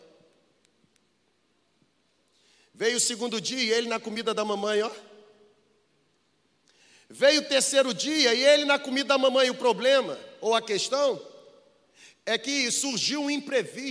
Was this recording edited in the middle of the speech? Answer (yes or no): no